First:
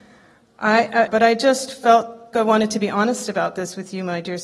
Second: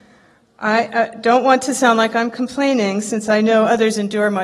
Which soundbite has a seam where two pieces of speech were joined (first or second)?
first